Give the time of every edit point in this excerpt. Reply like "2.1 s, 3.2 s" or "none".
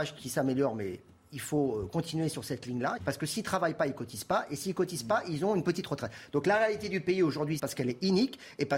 3.0 s, 7.6 s

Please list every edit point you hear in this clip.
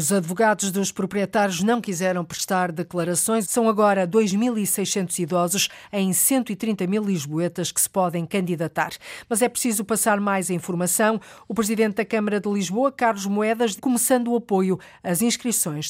3.4 s, 13.8 s

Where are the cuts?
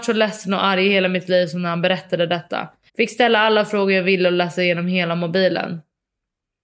2.9 s

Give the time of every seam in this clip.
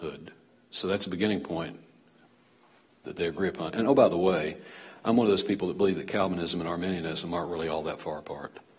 none

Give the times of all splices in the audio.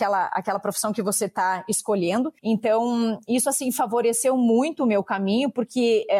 2.4 s

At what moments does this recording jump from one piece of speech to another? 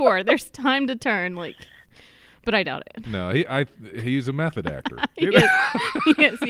none

